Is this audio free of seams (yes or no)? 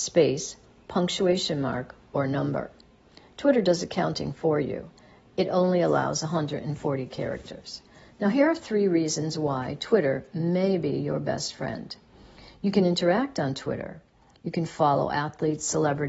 yes